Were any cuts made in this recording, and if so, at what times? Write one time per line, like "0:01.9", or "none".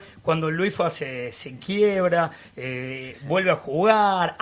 none